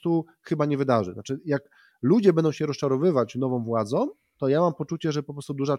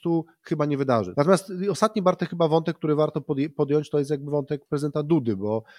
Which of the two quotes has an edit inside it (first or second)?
second